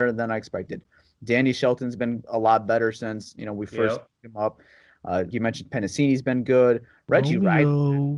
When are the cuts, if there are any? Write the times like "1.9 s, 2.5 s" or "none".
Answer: 5.3 s

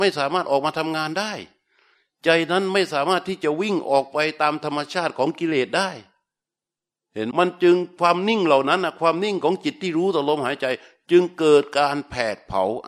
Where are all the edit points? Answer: 7.3 s

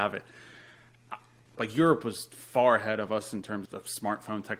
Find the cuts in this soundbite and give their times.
1.6 s, 3.7 s

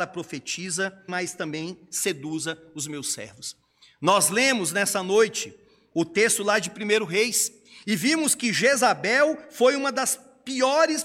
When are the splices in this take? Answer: 1.1 s

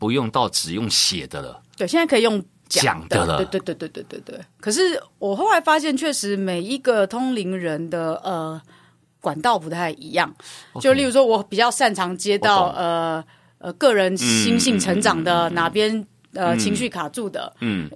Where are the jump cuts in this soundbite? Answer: none

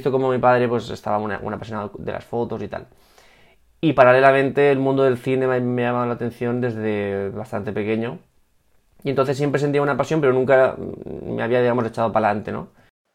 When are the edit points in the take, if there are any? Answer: none

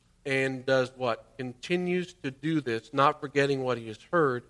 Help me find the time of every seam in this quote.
none

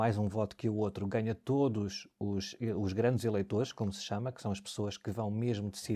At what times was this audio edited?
none

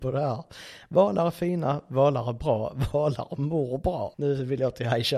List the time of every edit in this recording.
2.9 s, 4.1 s

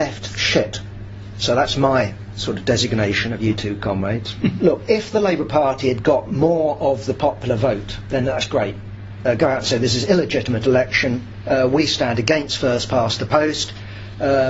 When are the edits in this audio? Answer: 4.6 s

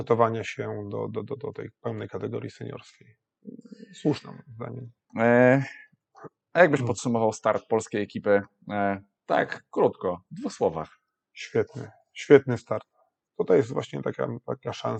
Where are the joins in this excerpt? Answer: 5.1 s, 13.3 s

